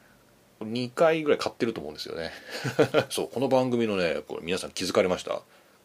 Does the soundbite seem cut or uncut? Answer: cut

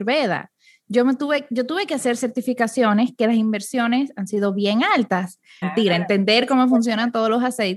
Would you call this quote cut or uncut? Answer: cut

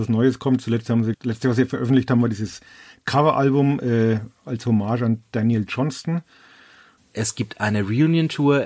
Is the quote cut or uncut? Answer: cut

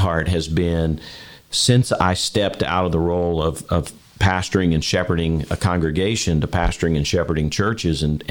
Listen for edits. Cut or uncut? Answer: uncut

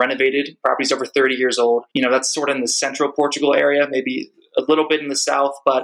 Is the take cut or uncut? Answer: cut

